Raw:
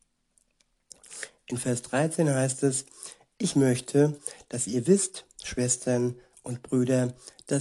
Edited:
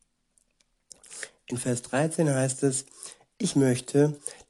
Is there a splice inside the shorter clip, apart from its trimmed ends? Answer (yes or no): no